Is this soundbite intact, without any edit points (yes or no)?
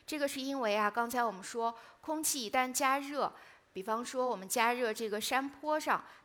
yes